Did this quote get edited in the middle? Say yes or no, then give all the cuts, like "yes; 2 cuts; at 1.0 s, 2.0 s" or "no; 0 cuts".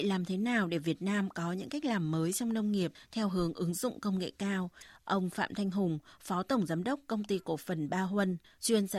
no; 0 cuts